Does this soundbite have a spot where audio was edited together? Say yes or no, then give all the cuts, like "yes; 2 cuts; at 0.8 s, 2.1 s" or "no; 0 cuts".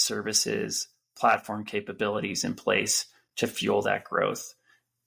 no; 0 cuts